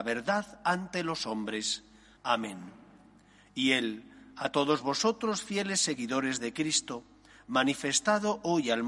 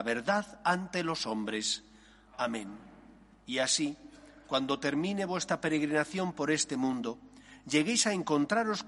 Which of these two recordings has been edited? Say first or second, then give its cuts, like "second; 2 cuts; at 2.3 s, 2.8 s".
first; 1 cut; at 2.2 s